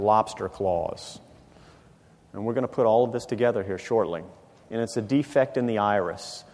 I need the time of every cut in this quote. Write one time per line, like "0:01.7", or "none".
0:04.6